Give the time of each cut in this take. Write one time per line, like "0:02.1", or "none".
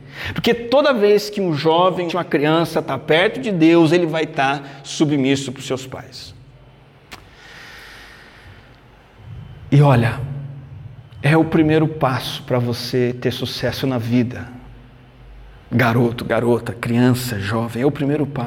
0:02.1